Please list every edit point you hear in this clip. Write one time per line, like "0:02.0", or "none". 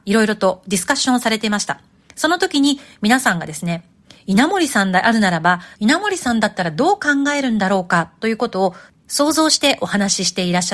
0:05.7